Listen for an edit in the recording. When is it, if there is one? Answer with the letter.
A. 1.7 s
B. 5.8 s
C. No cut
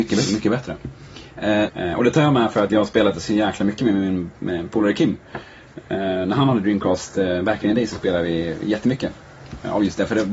A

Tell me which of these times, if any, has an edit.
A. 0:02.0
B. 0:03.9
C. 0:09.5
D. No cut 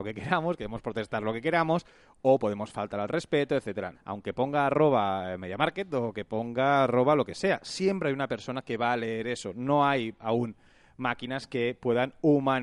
B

